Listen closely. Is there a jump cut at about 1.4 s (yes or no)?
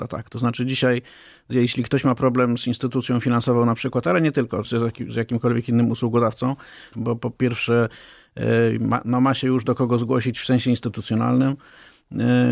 no